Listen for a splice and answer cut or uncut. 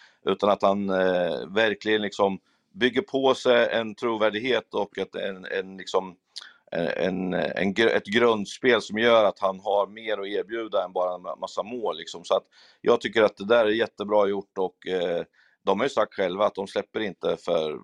uncut